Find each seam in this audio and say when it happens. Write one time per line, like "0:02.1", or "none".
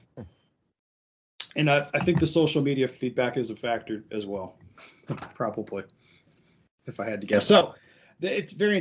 none